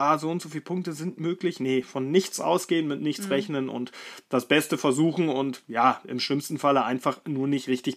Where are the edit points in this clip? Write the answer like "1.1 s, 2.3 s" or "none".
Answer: none